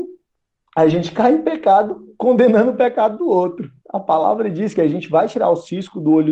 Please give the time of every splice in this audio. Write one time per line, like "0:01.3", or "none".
0:03.8